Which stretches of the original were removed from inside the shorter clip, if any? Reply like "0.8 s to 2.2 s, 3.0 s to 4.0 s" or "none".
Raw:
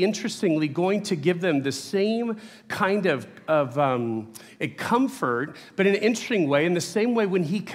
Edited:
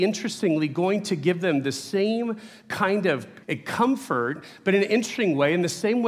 3.4 s to 4.5 s